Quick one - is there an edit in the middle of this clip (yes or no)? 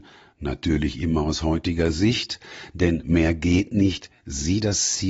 no